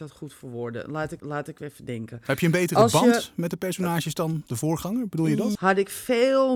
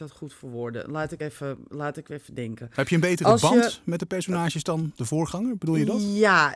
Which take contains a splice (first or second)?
first